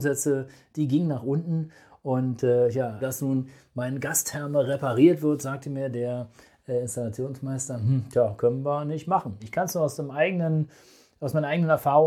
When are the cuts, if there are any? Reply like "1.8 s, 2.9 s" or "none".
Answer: 3.0 s, 9.4 s